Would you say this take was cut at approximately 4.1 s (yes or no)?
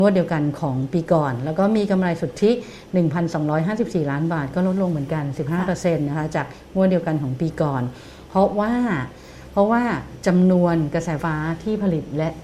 no